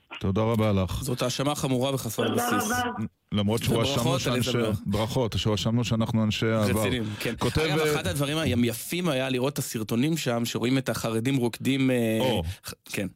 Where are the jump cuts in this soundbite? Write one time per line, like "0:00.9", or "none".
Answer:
none